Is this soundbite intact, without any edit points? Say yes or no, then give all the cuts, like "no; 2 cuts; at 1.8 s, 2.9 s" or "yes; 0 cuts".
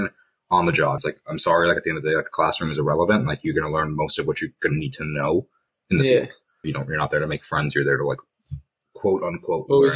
no; 2 cuts; at 1.0 s, 6.6 s